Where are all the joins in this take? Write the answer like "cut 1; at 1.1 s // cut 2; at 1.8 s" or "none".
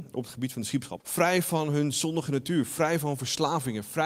cut 1; at 1.0 s